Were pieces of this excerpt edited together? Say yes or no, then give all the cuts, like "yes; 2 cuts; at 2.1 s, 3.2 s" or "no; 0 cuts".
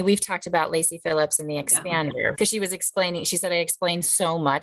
yes; 1 cut; at 2.3 s